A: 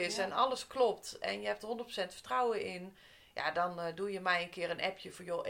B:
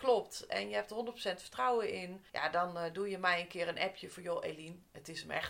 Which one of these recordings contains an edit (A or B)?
B